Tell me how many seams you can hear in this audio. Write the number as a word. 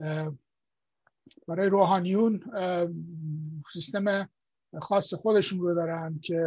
zero